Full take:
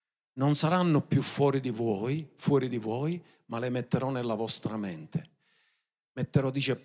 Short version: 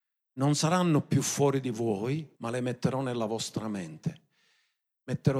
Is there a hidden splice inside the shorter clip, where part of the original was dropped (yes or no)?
yes